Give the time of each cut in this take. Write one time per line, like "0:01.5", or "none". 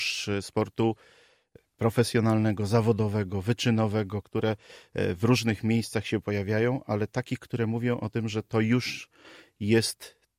0:04.2